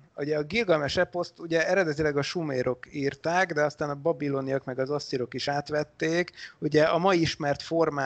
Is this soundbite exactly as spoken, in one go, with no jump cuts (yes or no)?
yes